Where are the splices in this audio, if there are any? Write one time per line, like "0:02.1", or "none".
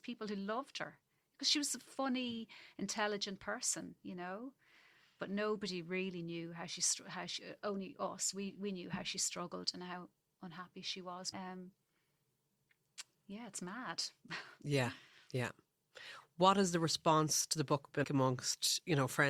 0:11.3
0:18.0